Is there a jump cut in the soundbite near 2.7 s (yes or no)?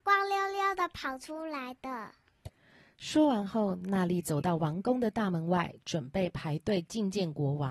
no